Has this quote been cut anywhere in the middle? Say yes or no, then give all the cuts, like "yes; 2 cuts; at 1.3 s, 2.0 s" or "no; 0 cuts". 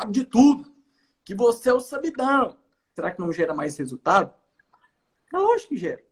yes; 1 cut; at 3.0 s